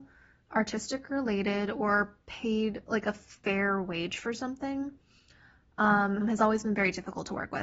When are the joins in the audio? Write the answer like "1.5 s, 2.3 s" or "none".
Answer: 6.2 s